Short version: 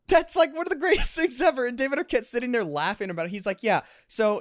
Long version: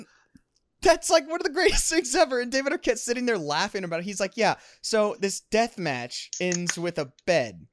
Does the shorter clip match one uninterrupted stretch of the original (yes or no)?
yes